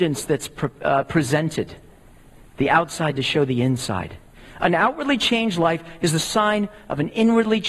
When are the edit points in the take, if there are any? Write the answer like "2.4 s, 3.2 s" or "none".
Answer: none